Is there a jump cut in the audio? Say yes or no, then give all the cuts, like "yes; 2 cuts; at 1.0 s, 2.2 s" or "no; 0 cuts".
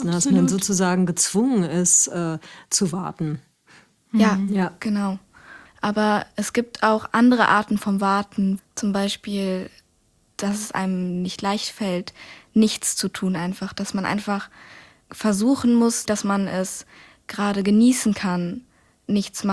yes; 2 cuts; at 5.7 s, 16.1 s